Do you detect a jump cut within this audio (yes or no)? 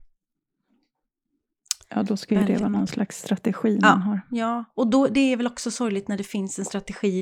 no